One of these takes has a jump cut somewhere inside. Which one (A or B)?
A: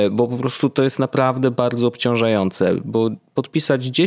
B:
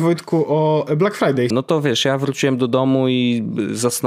B